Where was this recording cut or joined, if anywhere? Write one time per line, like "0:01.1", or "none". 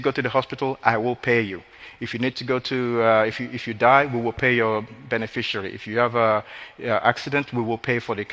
none